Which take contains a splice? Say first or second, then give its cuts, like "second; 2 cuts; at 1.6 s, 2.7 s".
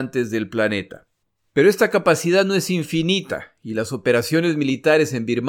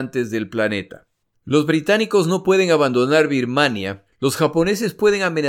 second; 2 cuts; at 1.3 s, 4.1 s